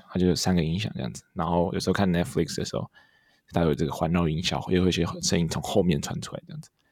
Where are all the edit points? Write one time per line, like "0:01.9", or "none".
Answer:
none